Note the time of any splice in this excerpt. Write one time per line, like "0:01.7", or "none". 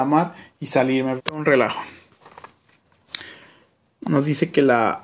0:01.2